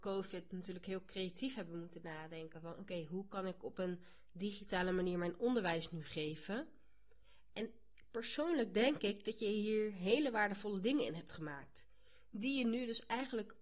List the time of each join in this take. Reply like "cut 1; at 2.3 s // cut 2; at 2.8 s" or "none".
none